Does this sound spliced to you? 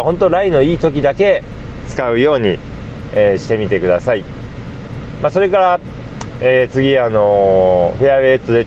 no; 0 cuts

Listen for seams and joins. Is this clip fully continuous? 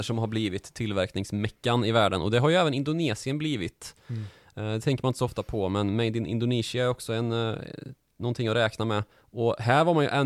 no; 1 cut; at 9.1 s

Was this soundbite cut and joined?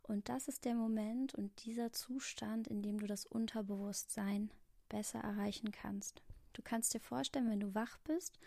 no; 0 cuts

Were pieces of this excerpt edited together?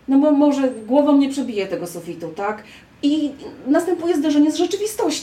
no; 0 cuts

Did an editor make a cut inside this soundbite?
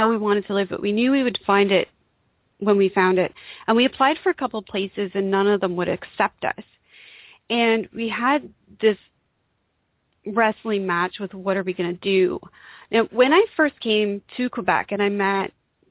no; 0 cuts

